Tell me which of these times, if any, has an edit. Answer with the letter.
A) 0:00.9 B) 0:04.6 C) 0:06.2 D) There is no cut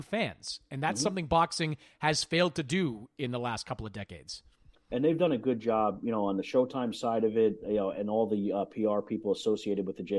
D